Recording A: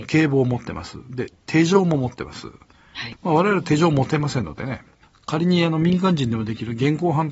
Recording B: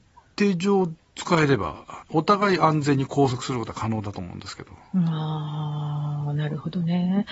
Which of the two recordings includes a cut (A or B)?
A